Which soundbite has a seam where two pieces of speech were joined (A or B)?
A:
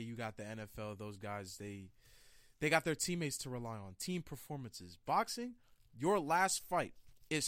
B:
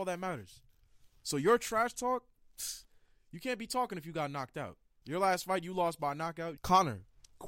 B